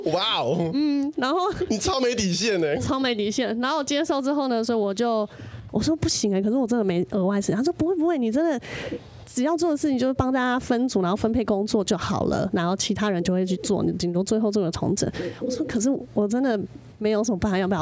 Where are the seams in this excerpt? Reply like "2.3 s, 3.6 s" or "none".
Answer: 5.7 s, 16.1 s